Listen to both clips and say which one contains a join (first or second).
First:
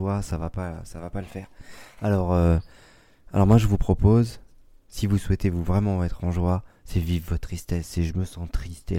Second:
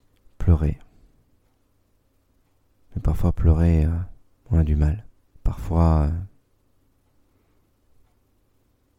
second